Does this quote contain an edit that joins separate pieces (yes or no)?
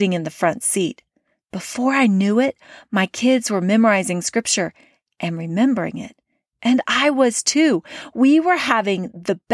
no